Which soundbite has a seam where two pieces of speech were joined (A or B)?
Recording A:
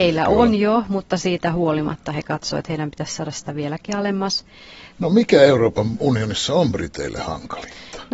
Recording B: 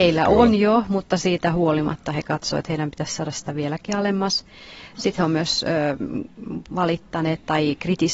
A